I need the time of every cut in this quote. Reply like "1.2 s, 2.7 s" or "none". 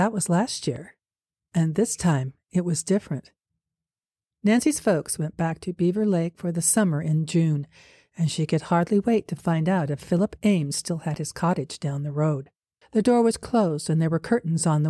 12.8 s

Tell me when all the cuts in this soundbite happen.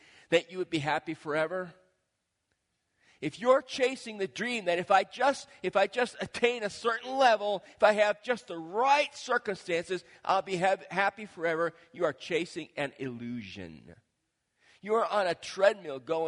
none

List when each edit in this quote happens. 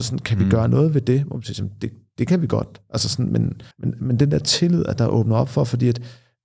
3.7 s

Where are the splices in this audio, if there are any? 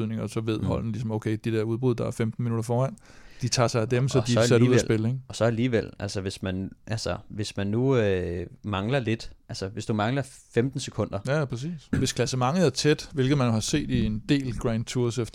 11.9 s

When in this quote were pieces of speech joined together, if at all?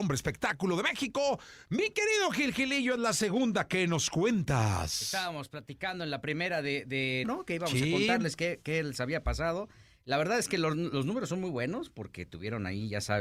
7.2 s

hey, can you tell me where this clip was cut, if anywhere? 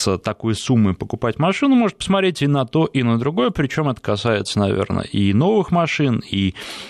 none

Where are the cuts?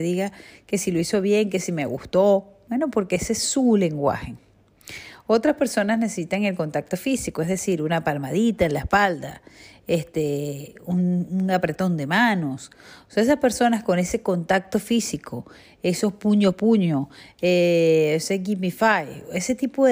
none

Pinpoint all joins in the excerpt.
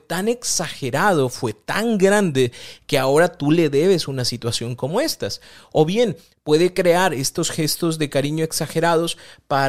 none

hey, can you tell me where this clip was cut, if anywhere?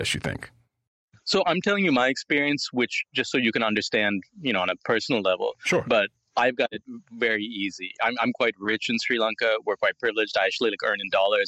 none

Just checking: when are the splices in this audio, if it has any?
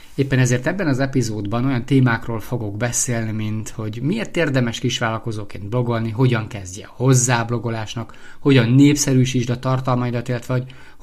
none

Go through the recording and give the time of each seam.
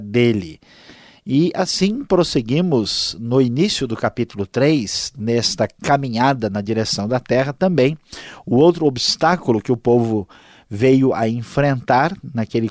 none

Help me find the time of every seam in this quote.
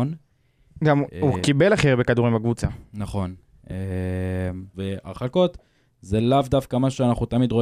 4.7 s

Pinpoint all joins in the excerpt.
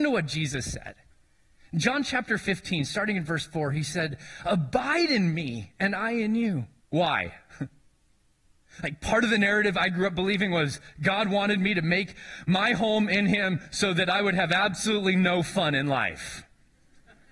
6.8 s

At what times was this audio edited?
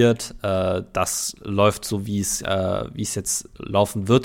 none

